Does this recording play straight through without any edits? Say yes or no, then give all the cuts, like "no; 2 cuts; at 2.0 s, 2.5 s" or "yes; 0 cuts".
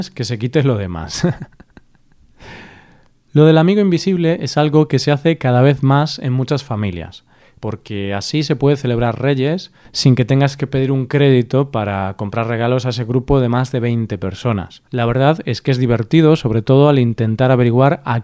no; 2 cuts; at 7.6 s, 14.9 s